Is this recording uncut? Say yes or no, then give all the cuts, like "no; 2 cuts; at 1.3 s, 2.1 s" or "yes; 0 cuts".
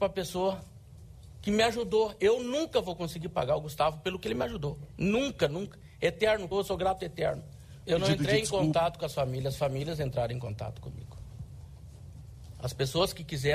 no; 2 cuts; at 6.5 s, 7.8 s